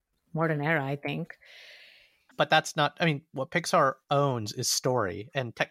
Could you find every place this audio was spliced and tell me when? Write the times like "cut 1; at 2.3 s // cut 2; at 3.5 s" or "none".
cut 1; at 2.3 s

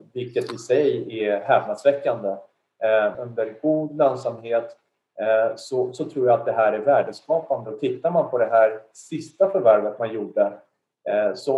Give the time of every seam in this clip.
cut 1; at 3.1 s

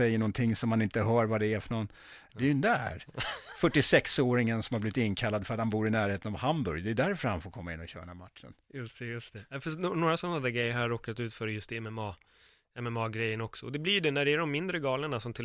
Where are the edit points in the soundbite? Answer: cut 1; at 2.3 s

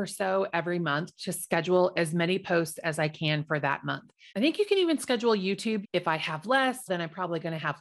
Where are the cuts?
cut 1; at 4.3 s // cut 2; at 5.8 s // cut 3; at 6.9 s

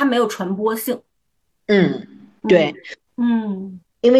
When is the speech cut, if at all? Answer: cut 1; at 3.1 s

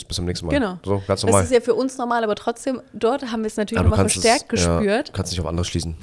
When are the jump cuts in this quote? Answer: none

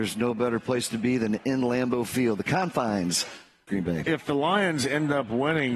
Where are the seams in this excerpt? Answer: cut 1; at 3.7 s

